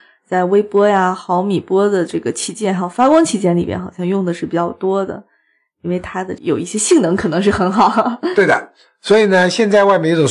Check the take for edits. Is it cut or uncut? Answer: uncut